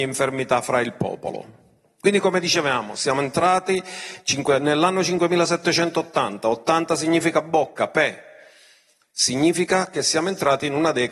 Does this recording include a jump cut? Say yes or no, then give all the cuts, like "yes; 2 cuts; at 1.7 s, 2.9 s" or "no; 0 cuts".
no; 0 cuts